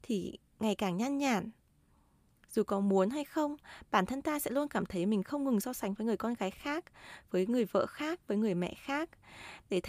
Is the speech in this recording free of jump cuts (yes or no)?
yes